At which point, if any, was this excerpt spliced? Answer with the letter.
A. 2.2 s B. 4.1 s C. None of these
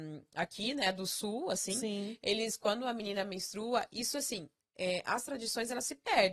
C